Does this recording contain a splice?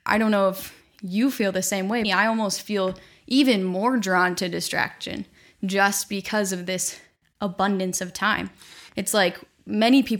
yes; 2 cuts; at 2.0 s, 8.9 s

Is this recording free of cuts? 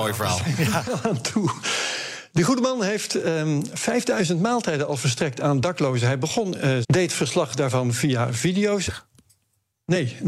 no; 2 cuts; at 6.8 s, 8.9 s

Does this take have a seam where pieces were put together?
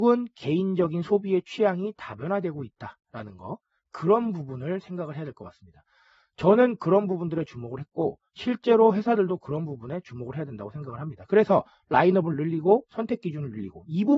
no; 0 cuts

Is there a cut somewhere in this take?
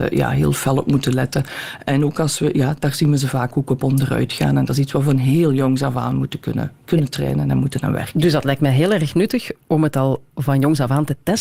no; 0 cuts

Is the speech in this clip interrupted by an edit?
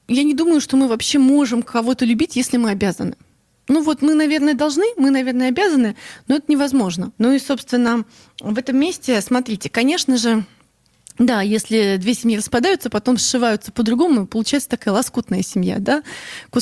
yes; 1 cut; at 7.1 s

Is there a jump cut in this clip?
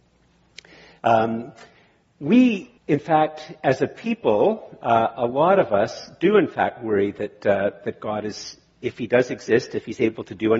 yes; 1 cut; at 2.8 s

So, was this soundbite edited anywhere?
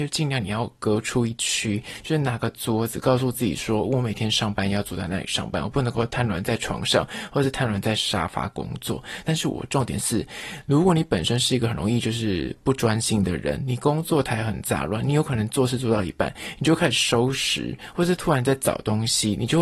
yes; 1 cut; at 9.2 s

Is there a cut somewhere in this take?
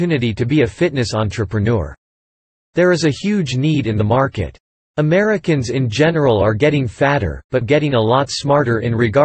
yes; 2 cuts; at 4.8 s, 7.6 s

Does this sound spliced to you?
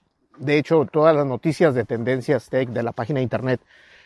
no; 0 cuts

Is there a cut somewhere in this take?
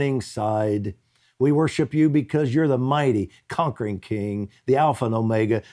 no; 0 cuts

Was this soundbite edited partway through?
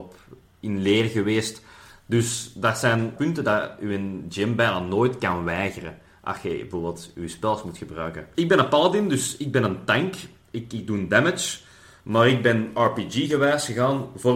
yes; 1 cut; at 3.2 s

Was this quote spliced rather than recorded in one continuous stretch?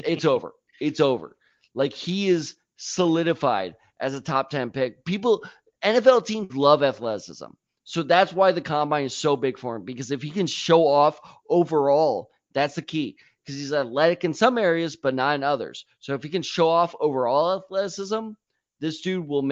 no; 0 cuts

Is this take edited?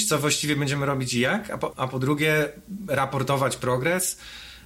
yes; 1 cut; at 1.7 s

